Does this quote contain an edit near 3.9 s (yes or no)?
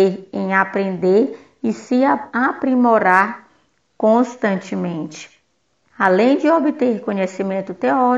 no